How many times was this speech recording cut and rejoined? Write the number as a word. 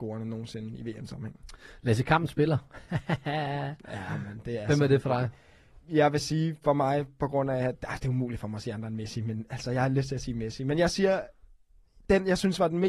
one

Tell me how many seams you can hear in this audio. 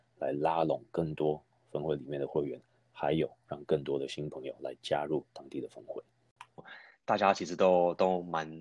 one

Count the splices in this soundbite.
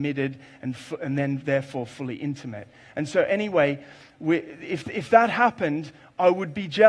zero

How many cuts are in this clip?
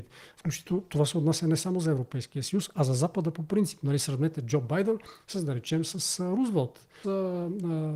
one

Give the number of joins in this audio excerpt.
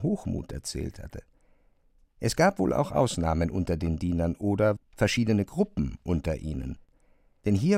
one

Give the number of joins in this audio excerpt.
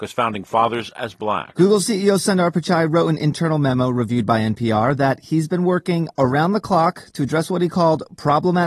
zero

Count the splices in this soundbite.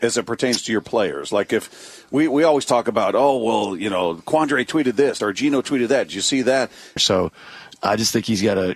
two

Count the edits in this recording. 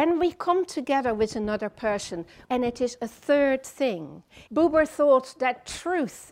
two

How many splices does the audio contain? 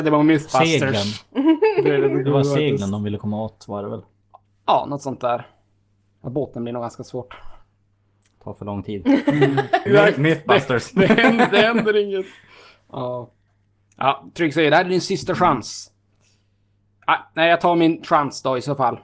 one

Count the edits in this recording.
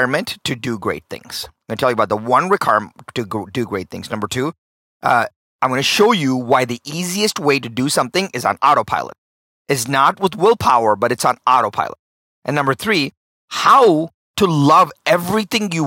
zero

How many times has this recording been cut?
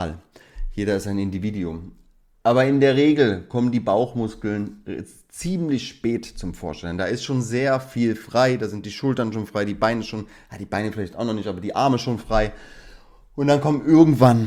zero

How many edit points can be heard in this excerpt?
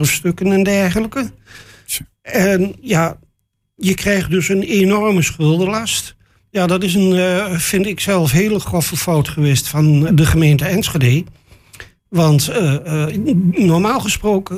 two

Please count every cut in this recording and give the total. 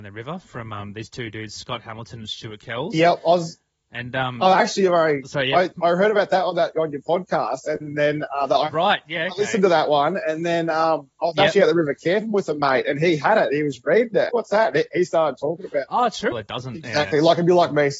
two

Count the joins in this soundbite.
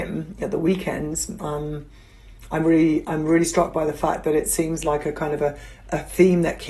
one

